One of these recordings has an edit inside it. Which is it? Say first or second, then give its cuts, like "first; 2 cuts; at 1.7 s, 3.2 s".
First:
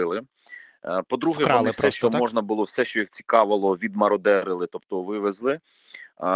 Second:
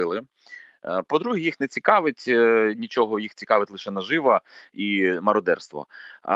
second; 1 cut; at 1.0 s